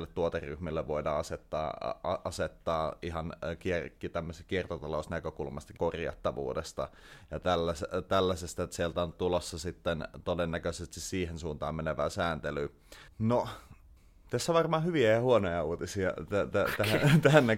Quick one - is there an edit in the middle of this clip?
yes; 3 cuts; at 5.8 s, 9.1 s, 13.1 s

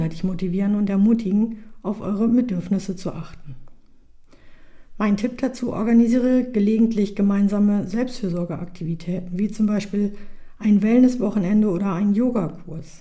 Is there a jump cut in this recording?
no; 0 cuts

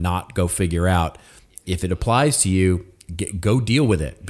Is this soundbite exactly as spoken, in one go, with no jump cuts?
yes; 0 cuts

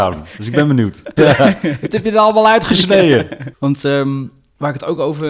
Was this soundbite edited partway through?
yes; 2 cuts; at 1.2 s, 3.5 s

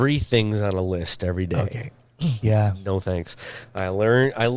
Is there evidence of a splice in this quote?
yes; 2 cuts; at 2.4 s, 3.6 s

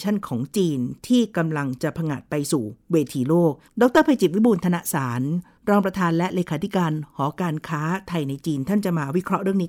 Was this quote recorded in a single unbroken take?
yes; 0 cuts

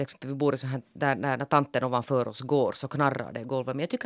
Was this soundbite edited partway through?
no; 0 cuts

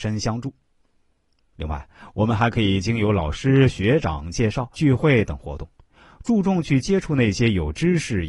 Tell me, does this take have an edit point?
yes; 1 cut; at 4.7 s

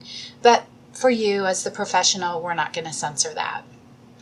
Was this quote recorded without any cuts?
yes; 0 cuts

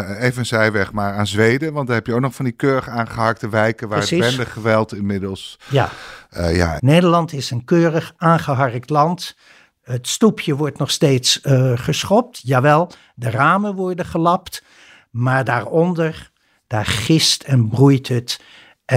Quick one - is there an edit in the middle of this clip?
yes; 1 cut; at 6.8 s

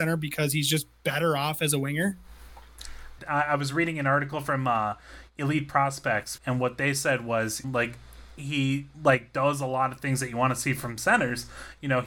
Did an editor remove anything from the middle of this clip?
yes; 3 cuts; at 3.2 s, 6.4 s, 7.6 s

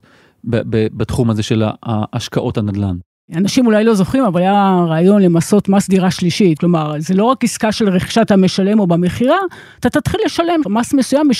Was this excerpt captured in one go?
no; 2 cuts; at 3.2 s, 6.6 s

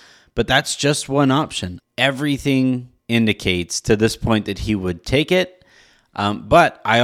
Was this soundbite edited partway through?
yes; 2 cuts; at 1.8 s, 3.0 s

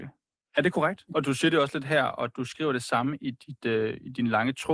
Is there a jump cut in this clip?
yes; 1 cut; at 1.1 s

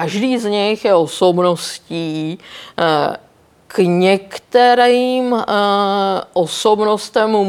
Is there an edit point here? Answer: no; 0 cuts

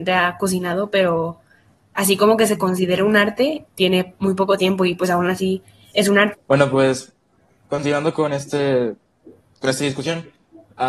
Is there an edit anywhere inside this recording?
yes; 2 cuts; at 3.7 s, 6.3 s

